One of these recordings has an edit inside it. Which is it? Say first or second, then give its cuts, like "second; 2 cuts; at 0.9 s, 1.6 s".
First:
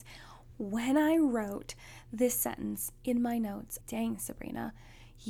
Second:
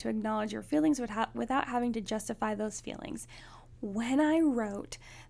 first; 1 cut; at 3.8 s